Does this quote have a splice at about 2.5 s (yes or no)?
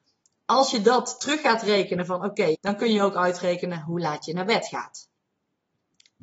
yes